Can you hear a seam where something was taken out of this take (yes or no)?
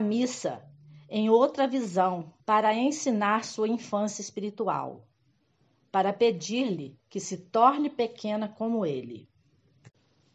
yes